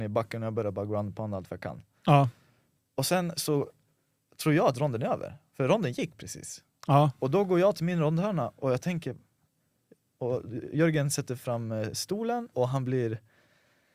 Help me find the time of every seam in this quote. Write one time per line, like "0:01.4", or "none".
0:12.5